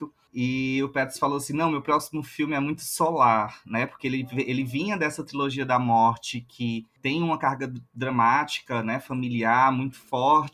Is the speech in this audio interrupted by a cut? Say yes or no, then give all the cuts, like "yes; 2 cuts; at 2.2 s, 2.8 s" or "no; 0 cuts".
no; 0 cuts